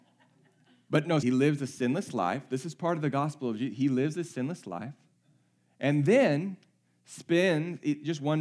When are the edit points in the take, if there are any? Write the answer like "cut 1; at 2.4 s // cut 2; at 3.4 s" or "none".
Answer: cut 1; at 1.2 s